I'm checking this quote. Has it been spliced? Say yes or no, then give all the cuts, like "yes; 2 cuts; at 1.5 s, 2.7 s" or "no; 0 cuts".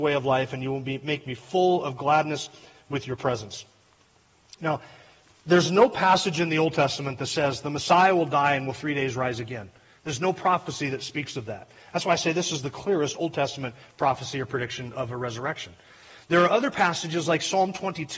no; 0 cuts